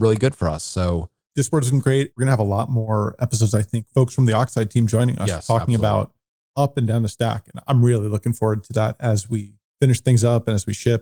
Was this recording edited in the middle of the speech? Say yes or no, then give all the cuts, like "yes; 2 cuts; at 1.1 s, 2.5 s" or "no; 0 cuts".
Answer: no; 0 cuts